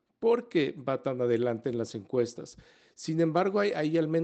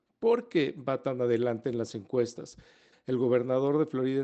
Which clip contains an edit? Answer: second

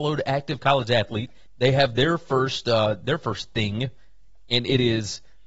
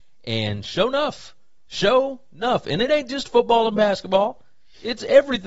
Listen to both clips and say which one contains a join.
first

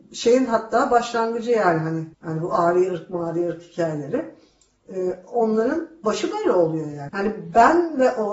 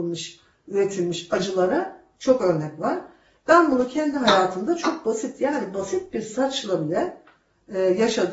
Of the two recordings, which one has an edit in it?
first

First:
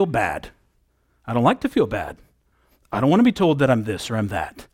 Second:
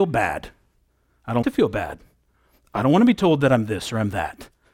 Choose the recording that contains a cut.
second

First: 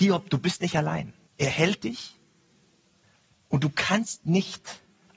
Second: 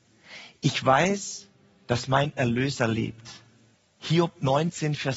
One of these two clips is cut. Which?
first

